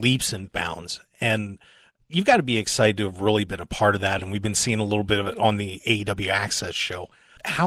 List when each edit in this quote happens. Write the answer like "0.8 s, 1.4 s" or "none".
none